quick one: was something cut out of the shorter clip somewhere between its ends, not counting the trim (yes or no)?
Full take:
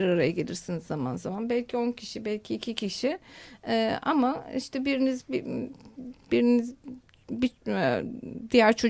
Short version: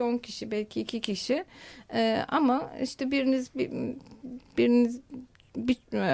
no